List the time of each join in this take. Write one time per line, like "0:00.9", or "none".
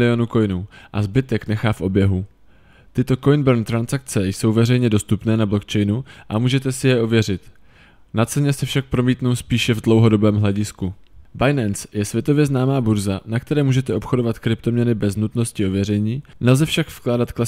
none